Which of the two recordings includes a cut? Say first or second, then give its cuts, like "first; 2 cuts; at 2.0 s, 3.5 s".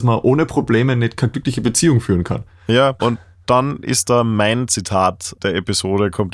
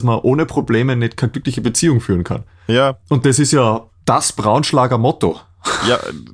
first; 1 cut; at 3.0 s